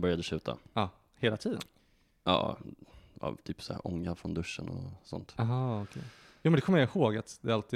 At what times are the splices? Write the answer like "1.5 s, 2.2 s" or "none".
none

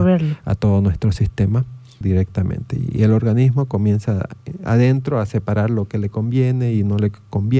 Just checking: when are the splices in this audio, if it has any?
2.0 s

